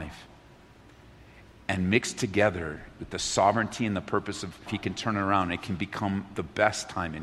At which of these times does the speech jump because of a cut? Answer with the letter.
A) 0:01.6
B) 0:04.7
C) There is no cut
B